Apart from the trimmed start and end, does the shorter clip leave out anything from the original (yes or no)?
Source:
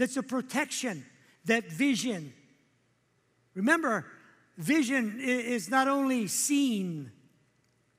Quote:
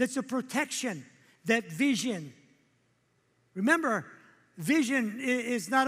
no